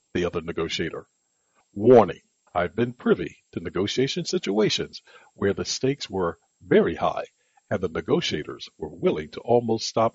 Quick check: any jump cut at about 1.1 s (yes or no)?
no